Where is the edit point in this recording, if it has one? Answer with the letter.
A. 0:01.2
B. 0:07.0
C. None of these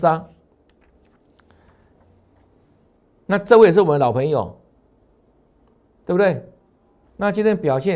B